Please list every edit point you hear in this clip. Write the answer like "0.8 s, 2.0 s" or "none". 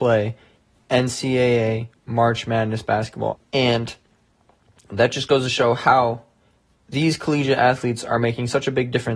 3.4 s